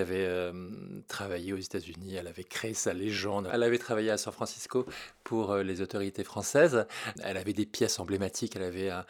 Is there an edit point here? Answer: no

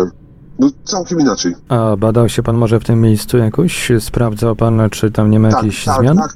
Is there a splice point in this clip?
no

